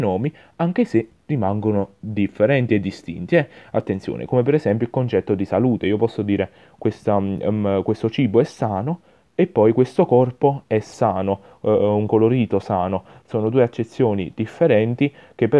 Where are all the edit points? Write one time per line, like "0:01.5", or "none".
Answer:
none